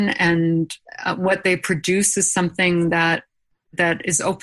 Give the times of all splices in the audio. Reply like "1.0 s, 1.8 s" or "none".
none